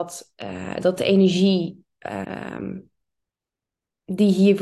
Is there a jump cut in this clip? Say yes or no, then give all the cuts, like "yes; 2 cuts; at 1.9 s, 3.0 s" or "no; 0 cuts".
yes; 1 cut; at 2.2 s